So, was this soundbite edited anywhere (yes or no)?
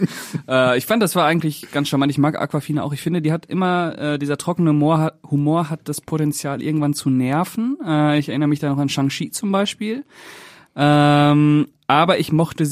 no